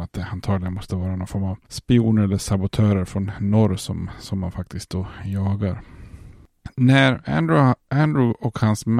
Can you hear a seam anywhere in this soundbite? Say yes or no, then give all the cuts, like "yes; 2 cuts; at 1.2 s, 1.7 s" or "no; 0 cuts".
no; 0 cuts